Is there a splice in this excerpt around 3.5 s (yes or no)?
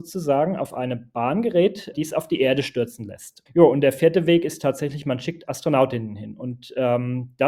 yes